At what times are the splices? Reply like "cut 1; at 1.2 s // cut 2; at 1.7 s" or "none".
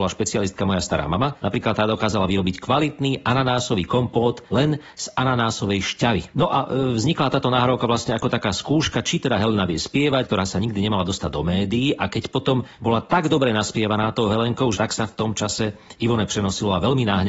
cut 1; at 6.3 s // cut 2; at 10.2 s // cut 3; at 14.7 s